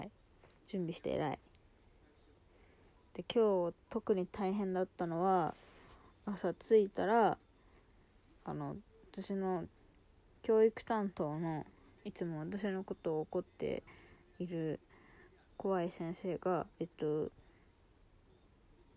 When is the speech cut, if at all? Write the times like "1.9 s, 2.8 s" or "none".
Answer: 1.0 s, 16.7 s